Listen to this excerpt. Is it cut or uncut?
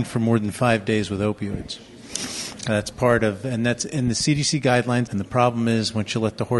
cut